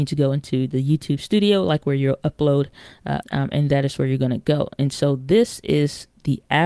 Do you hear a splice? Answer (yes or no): yes